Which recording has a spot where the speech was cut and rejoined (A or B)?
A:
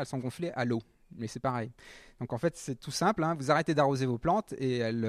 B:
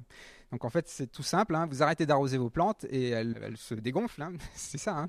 B